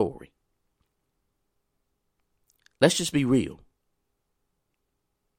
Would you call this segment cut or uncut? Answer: uncut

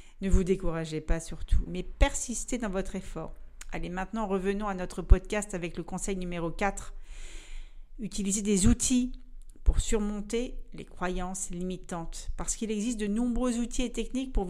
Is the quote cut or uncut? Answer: cut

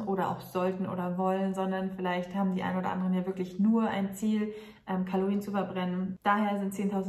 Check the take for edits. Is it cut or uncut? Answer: uncut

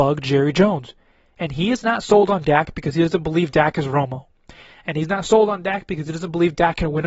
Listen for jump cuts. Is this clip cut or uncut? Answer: uncut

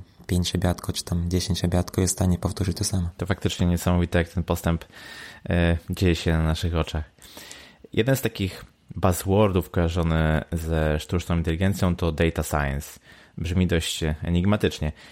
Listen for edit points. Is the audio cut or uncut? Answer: uncut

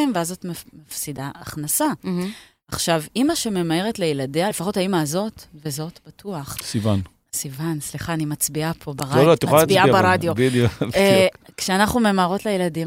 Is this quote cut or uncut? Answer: uncut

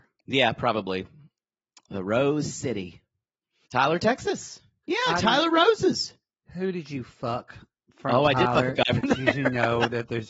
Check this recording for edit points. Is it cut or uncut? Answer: cut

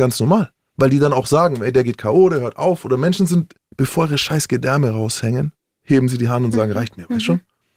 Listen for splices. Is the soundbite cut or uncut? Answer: uncut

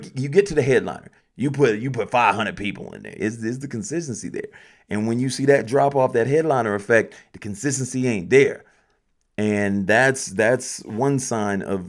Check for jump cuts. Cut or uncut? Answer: cut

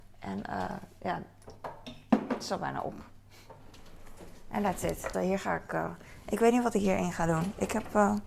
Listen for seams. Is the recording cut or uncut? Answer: cut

